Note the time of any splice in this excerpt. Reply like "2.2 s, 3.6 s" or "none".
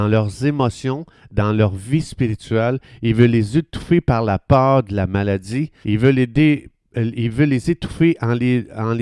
5.8 s

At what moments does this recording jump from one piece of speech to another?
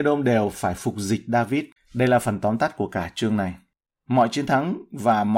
1.8 s

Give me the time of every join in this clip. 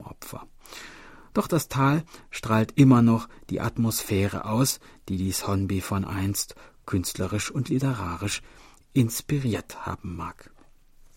none

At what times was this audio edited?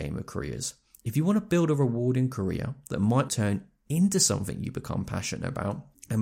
3.3 s

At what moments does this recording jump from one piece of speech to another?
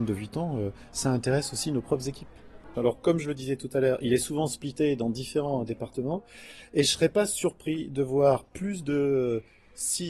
2.7 s

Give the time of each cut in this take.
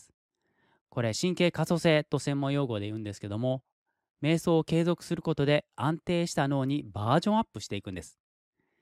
none

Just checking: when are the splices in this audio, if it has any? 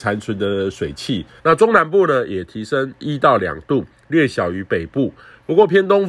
1.4 s

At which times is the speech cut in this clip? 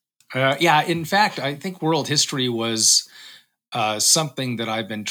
none

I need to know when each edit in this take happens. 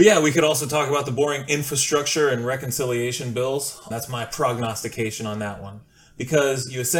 3.9 s

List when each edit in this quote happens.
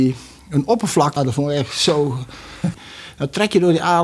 1.2 s, 2.7 s

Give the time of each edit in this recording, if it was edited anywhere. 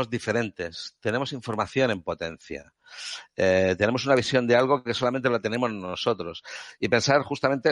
none

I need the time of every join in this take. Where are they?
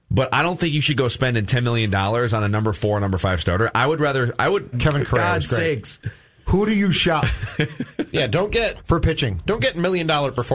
4.7 s

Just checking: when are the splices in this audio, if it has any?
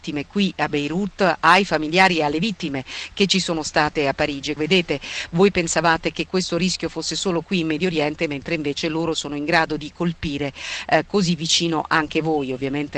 4.6 s

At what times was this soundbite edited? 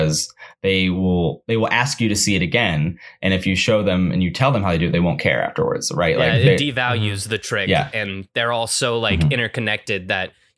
none

